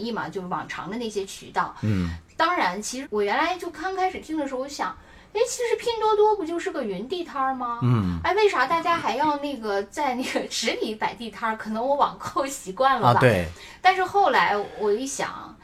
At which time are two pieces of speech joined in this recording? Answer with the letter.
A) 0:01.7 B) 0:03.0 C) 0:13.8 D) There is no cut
B